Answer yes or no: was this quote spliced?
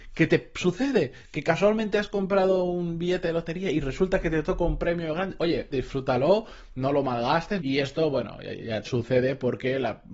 yes